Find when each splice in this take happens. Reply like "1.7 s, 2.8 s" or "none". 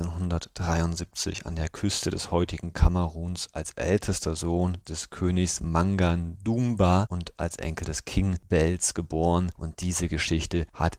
9.6 s